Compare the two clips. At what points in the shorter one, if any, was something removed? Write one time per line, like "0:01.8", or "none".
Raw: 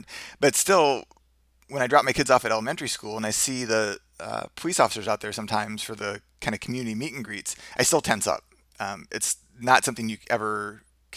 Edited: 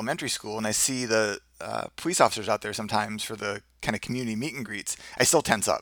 none